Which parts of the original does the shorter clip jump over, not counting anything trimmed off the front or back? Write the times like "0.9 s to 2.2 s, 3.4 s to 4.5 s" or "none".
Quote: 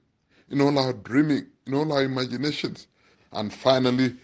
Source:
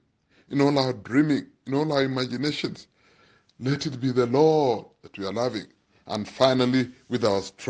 3.1 s to 5.9 s

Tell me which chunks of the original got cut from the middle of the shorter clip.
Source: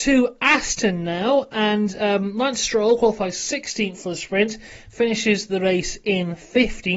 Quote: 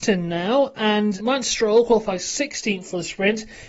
1.9 s to 2.3 s

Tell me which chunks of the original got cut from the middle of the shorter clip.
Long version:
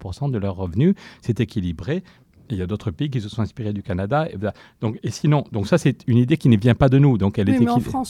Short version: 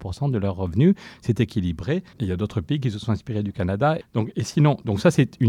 2.1 s to 2.4 s, 4.3 s to 4.7 s

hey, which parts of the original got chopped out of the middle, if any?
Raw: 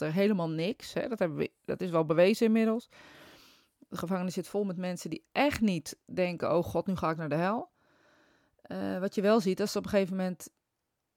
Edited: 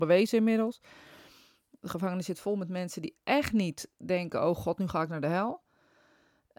none

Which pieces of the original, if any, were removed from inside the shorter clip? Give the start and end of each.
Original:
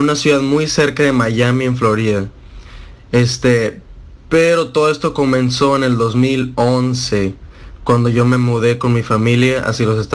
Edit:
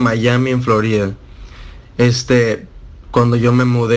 4.2 s to 7.8 s

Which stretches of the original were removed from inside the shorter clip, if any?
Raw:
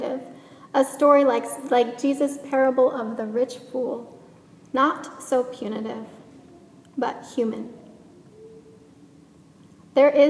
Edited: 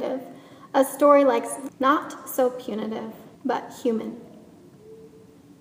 1.7 s to 4.6 s, 6.3 s to 6.9 s

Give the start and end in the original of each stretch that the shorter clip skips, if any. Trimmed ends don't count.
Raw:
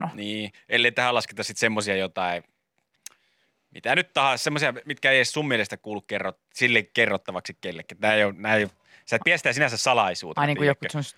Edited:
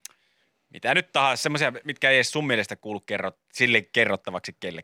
none

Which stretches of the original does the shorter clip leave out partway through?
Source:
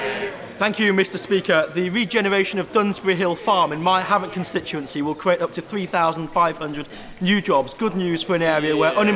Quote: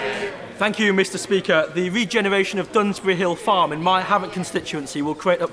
none

